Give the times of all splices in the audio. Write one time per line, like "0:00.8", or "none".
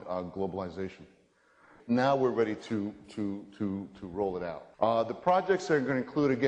0:01.8
0:04.7

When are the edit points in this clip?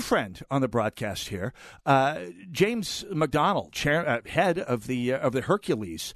0:03.7

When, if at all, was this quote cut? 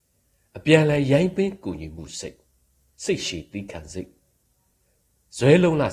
none

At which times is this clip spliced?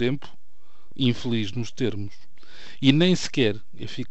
0:00.9

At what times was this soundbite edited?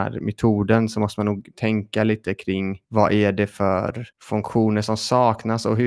0:02.8
0:04.1

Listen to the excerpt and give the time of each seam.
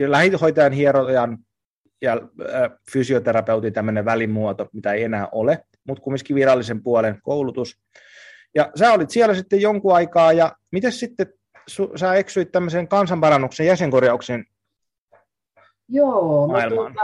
none

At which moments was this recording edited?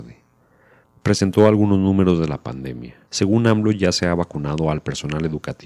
0:03.1

